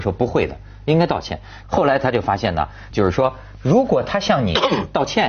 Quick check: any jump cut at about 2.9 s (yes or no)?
yes